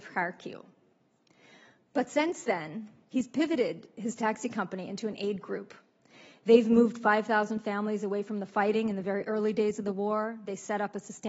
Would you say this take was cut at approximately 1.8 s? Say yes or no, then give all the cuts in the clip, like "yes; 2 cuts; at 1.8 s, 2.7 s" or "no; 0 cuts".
no; 1 cut; at 3.0 s